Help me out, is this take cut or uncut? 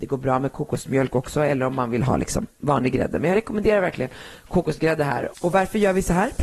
cut